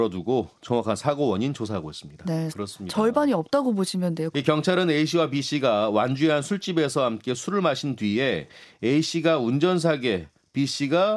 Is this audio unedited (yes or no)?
no